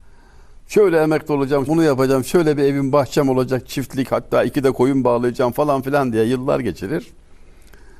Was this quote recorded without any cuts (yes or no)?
no